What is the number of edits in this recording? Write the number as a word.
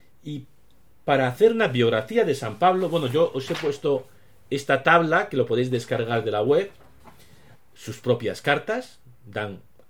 one